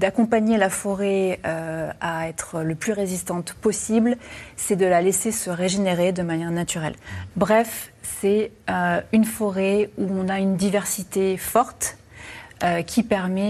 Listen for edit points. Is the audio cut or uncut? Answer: cut